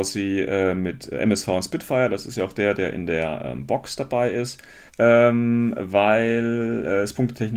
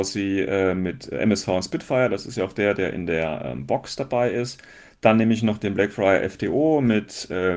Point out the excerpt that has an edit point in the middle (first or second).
first